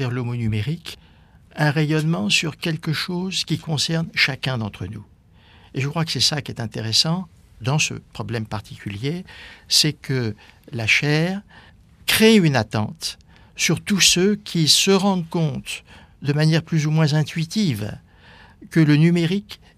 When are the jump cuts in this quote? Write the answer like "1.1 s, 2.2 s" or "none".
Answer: none